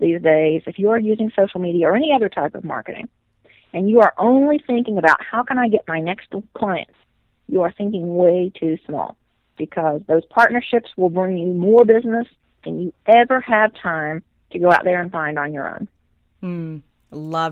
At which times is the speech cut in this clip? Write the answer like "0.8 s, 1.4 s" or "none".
none